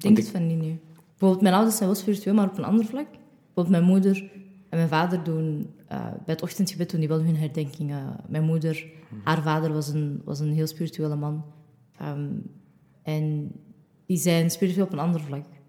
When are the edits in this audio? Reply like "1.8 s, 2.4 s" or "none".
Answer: none

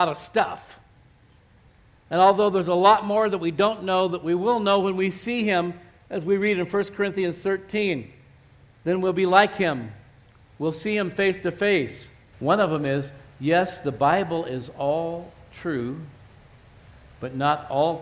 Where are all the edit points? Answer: 12.3 s

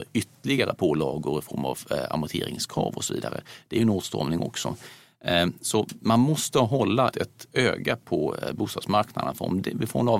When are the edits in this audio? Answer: 7.1 s

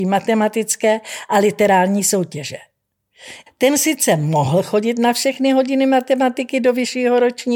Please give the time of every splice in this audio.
3.5 s

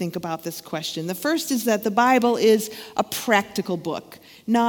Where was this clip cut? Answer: none

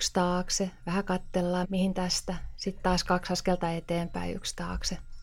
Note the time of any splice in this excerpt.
1.6 s

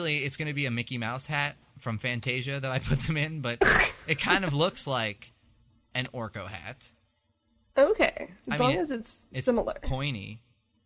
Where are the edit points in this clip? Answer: none

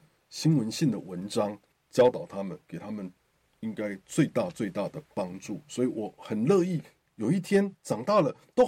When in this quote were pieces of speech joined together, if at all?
7.1 s

